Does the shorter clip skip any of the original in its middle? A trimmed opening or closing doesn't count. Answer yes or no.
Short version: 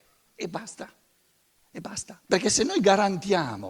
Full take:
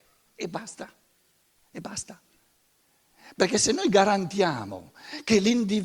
yes